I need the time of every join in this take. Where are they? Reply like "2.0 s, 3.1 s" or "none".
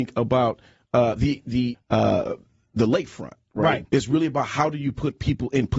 1.7 s, 3.8 s